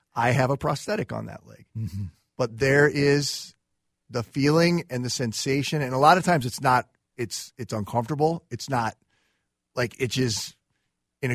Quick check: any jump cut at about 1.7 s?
no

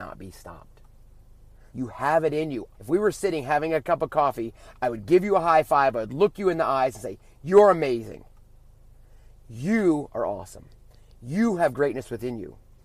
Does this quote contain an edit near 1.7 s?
yes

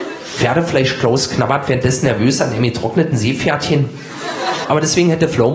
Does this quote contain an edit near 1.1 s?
no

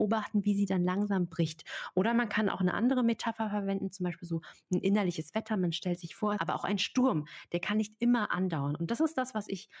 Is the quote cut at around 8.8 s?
no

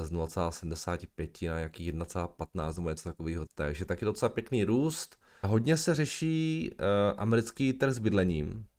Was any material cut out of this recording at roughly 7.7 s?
no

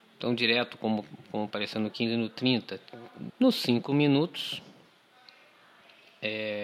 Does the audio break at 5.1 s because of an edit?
no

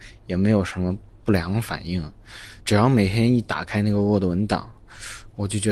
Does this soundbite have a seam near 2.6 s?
yes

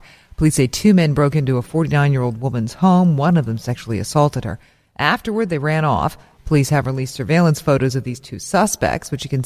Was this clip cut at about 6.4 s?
yes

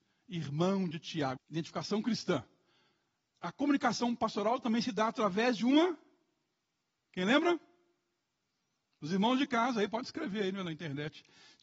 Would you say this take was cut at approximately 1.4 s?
yes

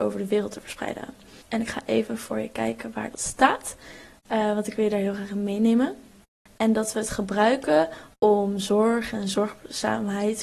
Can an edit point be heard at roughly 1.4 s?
yes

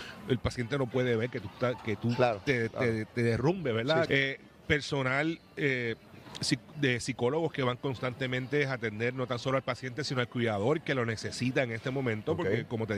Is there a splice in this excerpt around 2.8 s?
no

